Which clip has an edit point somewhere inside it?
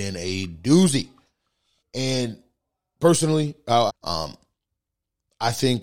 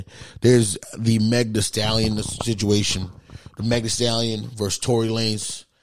first; 2 cuts; at 1.8 s, 3.9 s

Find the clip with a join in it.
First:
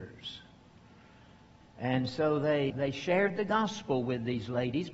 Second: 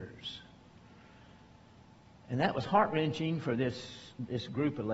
first; 2 cuts; at 1.6 s, 2.7 s

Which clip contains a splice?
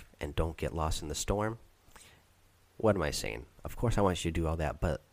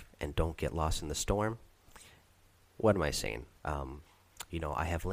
second; 1 cut; at 3.6 s

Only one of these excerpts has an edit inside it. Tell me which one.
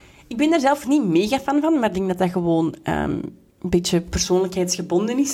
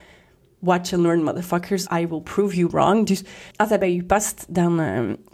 second; 2 cuts; at 1.9 s, 3.5 s

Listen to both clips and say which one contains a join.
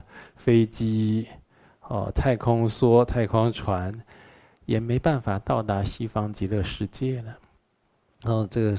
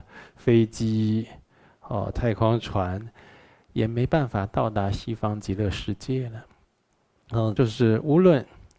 second; 2 cuts; at 2.1 s, 7.6 s

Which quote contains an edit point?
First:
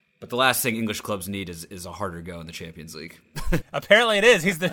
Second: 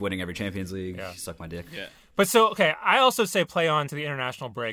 first; 1 cut; at 3.6 s

